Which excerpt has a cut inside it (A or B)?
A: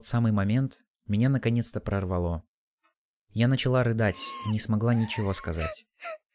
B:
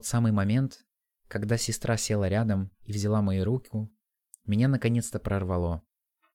A